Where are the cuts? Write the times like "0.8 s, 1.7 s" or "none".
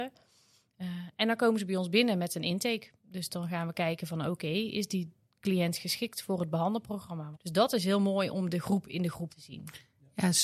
7.3 s, 9.3 s